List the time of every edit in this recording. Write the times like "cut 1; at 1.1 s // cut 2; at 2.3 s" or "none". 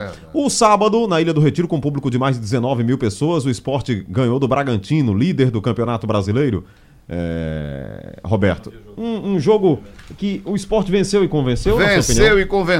none